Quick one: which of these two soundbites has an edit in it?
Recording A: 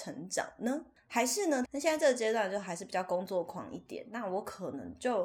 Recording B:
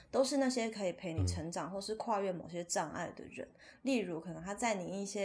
A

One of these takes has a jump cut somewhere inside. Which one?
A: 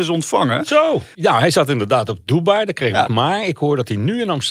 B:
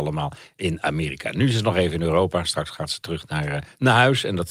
A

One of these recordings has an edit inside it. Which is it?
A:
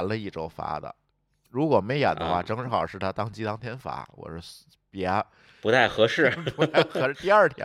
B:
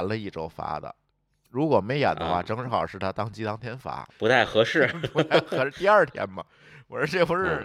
B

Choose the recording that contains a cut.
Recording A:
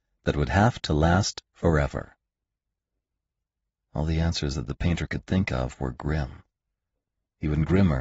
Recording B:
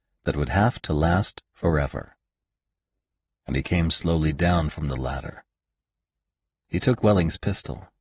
B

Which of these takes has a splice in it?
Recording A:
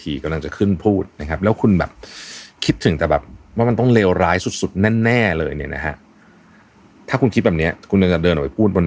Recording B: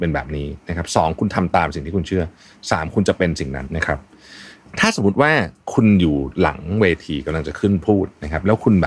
B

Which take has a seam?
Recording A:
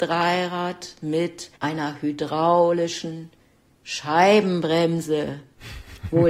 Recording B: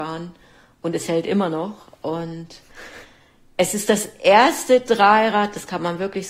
A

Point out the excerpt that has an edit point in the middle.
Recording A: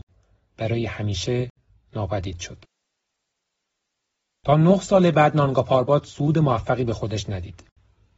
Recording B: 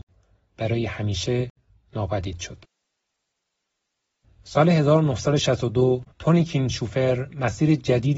B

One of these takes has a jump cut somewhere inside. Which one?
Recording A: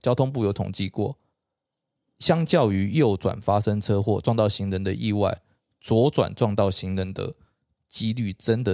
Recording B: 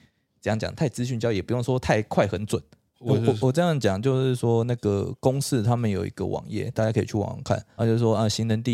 B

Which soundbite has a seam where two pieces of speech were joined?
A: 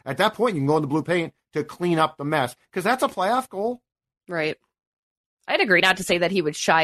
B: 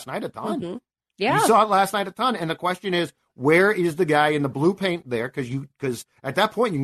A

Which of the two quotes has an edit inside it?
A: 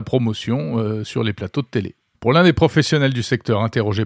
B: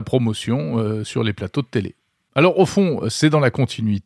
A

